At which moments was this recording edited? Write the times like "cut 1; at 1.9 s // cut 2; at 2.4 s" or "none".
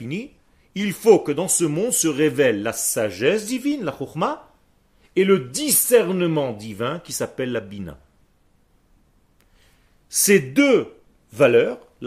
none